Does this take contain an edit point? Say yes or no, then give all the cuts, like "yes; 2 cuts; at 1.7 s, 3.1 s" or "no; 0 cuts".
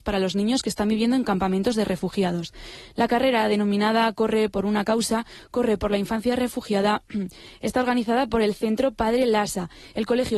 no; 0 cuts